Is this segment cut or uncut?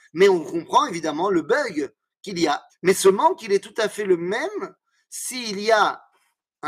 cut